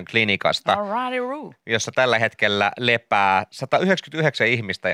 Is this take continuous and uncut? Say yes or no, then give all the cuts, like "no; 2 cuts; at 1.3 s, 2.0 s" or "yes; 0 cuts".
yes; 0 cuts